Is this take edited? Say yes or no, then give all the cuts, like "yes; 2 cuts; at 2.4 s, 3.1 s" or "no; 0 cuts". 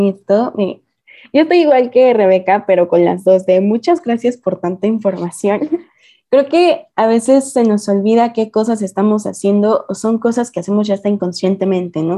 no; 0 cuts